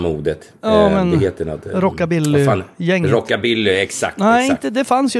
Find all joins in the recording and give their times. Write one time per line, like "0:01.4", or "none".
none